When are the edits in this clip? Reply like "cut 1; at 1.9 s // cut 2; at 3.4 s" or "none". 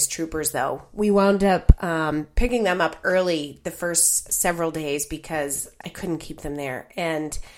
cut 1; at 5.8 s